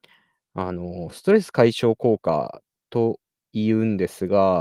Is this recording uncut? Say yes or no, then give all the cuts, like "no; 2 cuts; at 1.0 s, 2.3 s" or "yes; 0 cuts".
yes; 0 cuts